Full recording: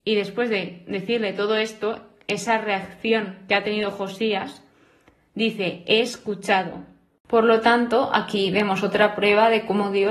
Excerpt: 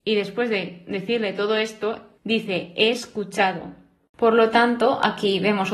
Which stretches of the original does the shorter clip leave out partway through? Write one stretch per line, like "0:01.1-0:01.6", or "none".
0:02.2-0:05.3